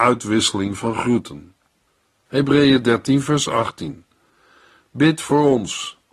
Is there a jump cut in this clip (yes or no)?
yes